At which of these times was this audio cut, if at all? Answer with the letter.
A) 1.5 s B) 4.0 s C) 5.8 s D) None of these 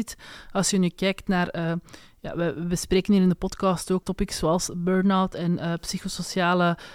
B